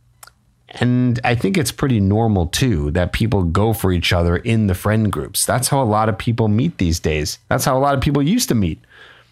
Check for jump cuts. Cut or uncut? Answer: uncut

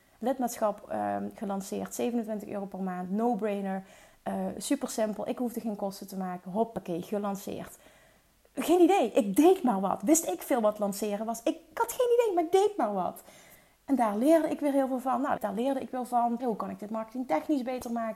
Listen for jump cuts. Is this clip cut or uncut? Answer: cut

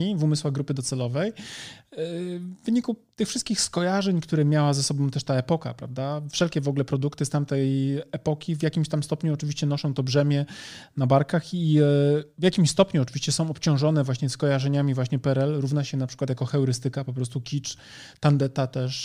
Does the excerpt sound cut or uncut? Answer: uncut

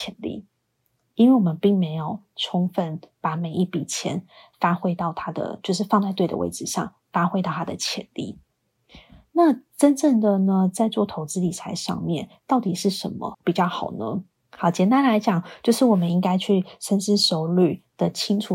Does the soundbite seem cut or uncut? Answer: uncut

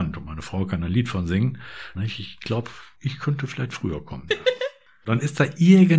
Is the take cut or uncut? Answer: cut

